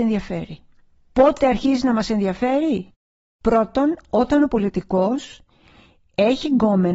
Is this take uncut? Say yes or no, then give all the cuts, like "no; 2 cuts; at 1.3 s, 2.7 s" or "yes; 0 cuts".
yes; 0 cuts